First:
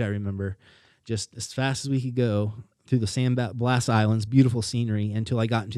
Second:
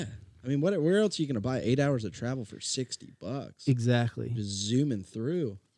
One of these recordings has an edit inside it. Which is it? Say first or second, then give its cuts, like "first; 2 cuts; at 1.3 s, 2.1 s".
first; 1 cut; at 4.3 s